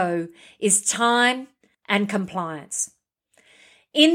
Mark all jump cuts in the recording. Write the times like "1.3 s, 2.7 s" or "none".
1.7 s